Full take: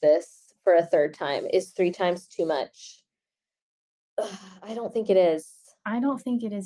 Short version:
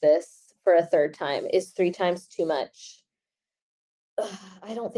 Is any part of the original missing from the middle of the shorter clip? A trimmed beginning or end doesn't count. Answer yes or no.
no